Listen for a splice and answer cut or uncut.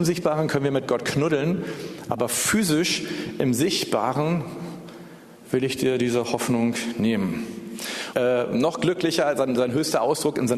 cut